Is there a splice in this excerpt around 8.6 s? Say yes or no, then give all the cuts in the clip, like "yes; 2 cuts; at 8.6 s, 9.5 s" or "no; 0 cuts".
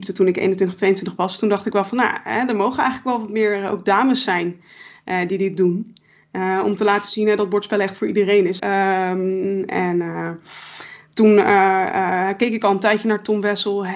yes; 1 cut; at 8.6 s